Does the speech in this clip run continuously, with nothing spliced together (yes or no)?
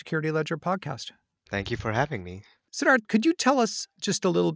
yes